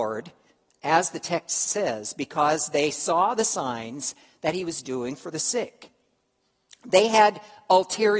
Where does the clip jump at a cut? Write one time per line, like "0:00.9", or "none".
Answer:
none